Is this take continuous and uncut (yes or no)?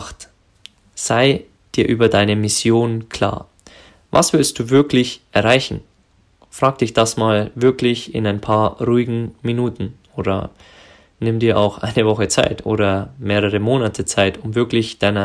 yes